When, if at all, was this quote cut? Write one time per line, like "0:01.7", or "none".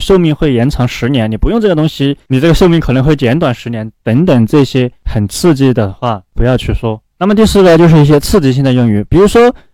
0:07.1